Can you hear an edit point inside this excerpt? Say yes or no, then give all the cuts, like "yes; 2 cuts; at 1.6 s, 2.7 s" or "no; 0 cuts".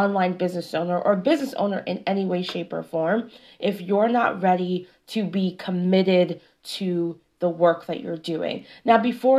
no; 0 cuts